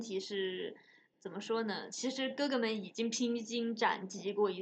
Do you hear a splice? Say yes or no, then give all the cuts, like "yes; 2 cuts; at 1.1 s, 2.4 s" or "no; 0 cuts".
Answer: no; 0 cuts